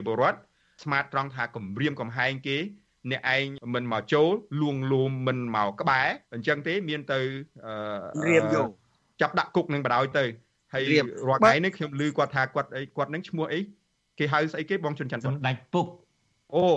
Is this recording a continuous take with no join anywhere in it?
no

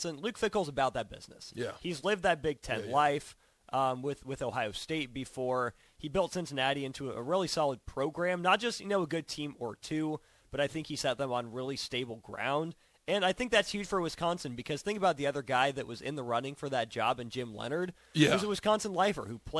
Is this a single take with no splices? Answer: yes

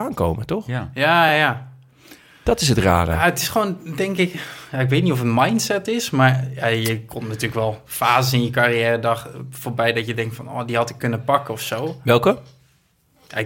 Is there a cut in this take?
no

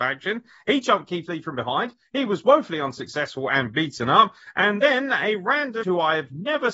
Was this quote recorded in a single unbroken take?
no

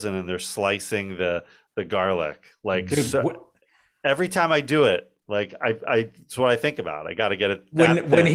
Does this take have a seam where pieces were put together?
no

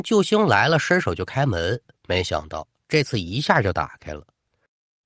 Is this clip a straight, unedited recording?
yes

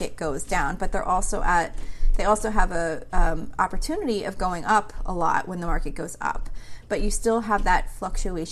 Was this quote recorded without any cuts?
yes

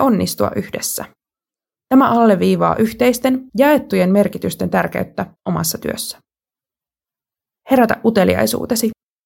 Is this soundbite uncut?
yes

